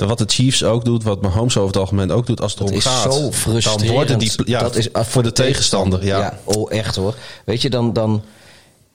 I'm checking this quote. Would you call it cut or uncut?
uncut